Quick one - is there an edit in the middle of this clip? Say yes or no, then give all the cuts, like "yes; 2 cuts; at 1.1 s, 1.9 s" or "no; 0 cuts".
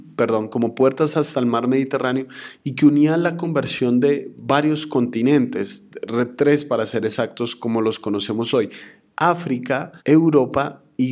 yes; 1 cut; at 10.0 s